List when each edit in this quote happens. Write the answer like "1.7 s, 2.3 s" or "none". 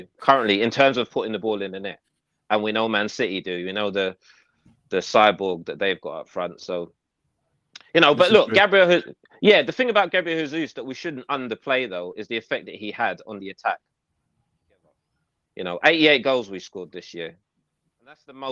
none